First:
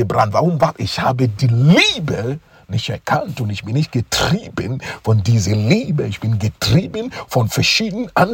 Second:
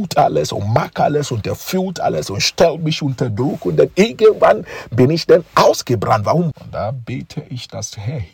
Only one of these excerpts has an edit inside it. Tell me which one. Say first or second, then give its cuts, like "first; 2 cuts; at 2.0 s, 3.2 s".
second; 1 cut; at 6.5 s